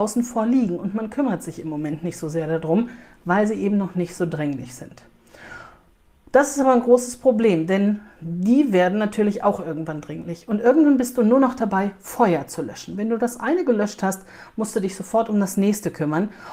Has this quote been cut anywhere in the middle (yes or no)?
no